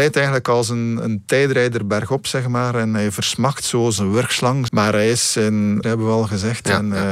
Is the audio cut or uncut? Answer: cut